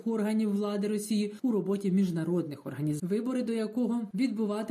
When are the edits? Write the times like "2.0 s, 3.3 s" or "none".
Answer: 3.0 s